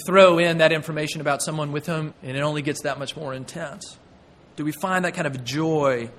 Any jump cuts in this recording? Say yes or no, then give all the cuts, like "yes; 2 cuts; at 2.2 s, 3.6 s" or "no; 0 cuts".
yes; 1 cut; at 2.1 s